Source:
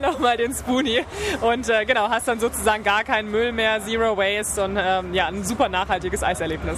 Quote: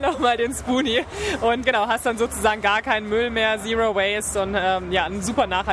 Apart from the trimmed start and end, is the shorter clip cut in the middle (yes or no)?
yes